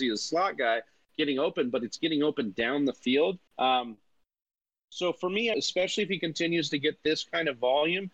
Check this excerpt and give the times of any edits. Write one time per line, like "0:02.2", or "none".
0:03.5
0:05.5

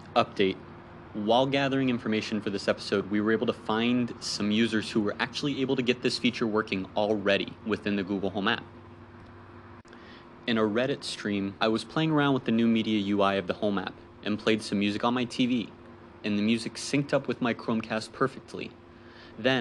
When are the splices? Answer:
0:11.6
0:16.2

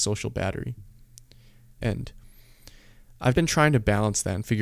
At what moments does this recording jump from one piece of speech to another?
0:01.8
0:03.3

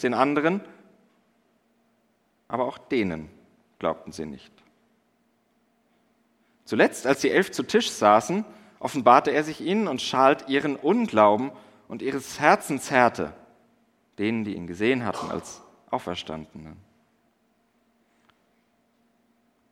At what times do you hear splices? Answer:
0:14.1

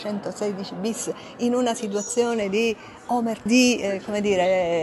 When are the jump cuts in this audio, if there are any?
0:03.5

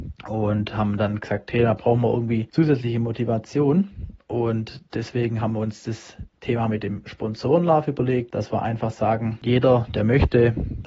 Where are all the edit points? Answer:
none

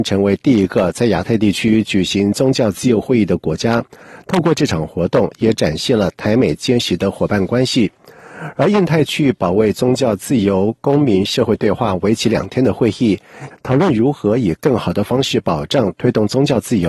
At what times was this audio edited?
0:13.5

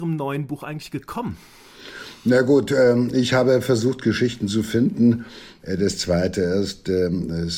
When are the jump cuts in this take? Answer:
0:05.6

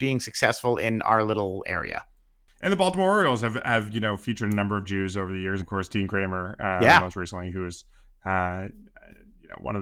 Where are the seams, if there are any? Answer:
0:05.6

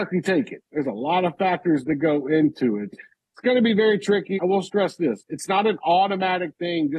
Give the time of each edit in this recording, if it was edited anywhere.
0:02.9
0:04.4

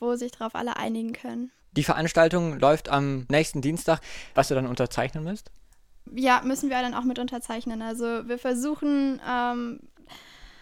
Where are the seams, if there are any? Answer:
0:01.6
0:04.3

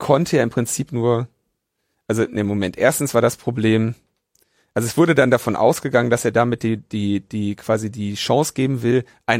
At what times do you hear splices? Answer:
none

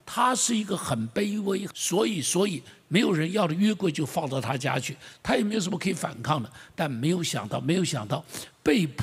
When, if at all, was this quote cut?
0:01.7

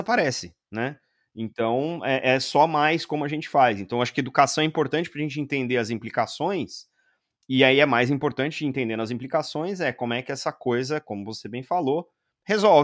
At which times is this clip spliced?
none

